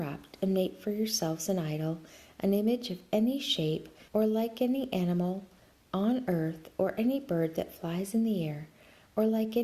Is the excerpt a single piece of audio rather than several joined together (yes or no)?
no